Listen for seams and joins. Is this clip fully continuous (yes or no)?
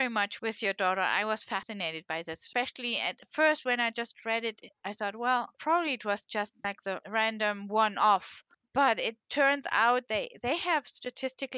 yes